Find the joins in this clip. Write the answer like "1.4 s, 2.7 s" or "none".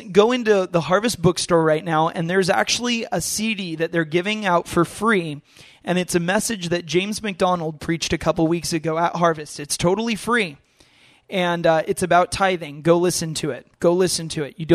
13.7 s